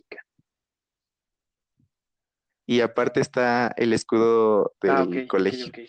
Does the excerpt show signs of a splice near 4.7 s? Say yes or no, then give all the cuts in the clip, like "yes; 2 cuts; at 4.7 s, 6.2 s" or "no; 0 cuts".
yes; 1 cut; at 4.7 s